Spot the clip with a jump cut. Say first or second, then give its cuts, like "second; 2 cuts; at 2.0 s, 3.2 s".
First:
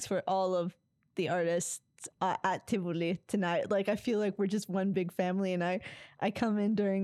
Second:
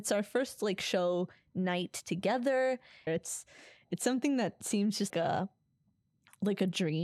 second; 2 cuts; at 3.1 s, 5.1 s